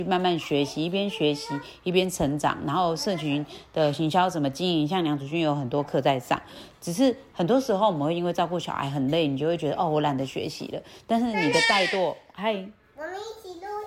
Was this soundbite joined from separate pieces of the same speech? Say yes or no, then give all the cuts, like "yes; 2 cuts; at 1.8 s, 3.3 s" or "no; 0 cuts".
no; 0 cuts